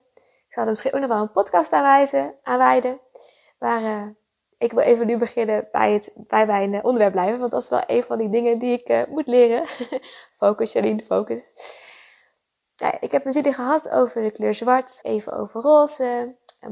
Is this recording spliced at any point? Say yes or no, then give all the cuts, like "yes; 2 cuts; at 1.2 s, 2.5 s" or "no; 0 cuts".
yes; 1 cut; at 15.0 s